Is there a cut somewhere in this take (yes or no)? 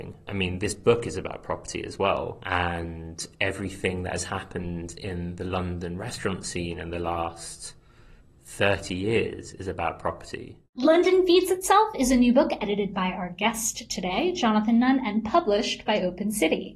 yes